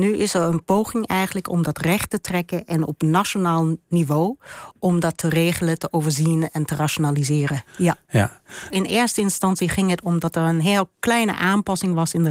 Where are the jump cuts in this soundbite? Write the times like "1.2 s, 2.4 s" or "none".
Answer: 7.7 s, 8.7 s